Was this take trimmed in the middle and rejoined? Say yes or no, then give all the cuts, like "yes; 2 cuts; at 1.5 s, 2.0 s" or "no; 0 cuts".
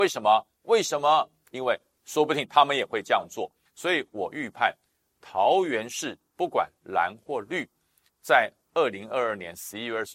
no; 0 cuts